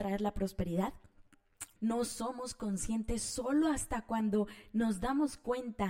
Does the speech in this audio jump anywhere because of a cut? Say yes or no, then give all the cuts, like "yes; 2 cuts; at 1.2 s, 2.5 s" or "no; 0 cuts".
yes; 1 cut; at 1.8 s